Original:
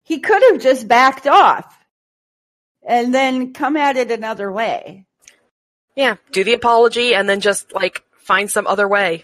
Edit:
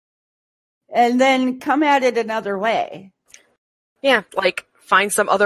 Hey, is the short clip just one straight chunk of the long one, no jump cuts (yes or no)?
no